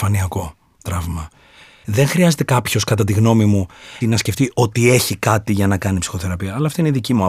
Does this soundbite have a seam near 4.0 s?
yes; 2 cuts; at 1.8 s, 4.0 s

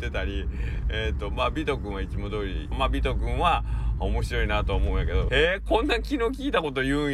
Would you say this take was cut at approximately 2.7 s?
yes; 2 cuts; at 2.7 s, 5.3 s

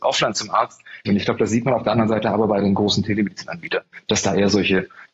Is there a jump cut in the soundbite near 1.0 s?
yes; 1 cut; at 1.0 s

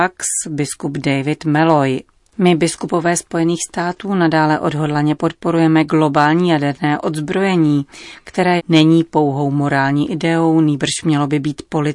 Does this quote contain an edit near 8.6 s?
yes; 1 cut; at 8.6 s

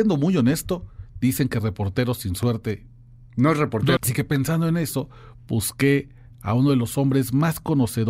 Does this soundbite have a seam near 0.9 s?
no; 1 cut; at 4.0 s

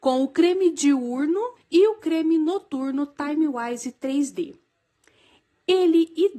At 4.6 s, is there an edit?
no; 1 cut; at 1.6 s

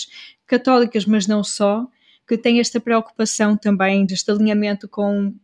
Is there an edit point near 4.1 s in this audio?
yes; 1 cut; at 4.1 s

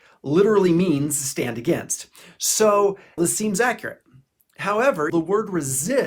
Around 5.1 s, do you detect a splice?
yes; 2 cuts; at 3.2 s, 5.1 s

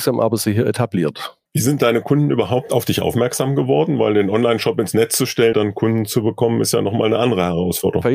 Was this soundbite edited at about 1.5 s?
yes; 2 cuts; at 1.5 s, 5.5 s

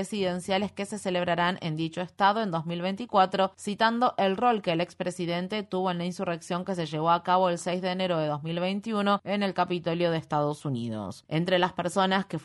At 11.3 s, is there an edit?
yes; 1 cut; at 11.3 s

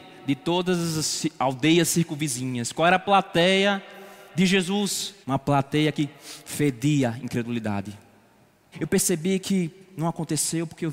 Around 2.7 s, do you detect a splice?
no; 2 cuts; at 5.2 s, 8.7 s

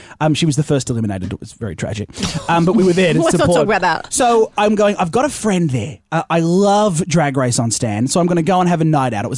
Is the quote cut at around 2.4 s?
no; 0 cuts

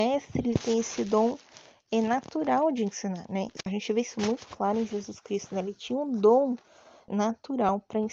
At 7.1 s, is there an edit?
yes; 1 cut; at 7.1 s

